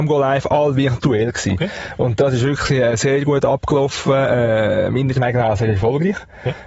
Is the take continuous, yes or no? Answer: yes